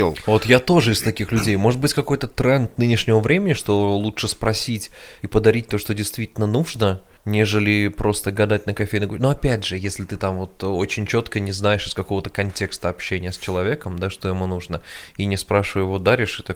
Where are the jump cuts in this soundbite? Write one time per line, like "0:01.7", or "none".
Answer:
none